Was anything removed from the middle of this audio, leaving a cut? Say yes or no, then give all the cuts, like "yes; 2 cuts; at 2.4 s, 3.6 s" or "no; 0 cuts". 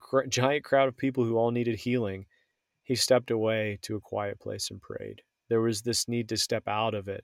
no; 0 cuts